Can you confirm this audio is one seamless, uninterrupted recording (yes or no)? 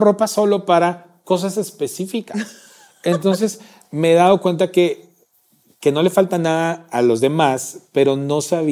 yes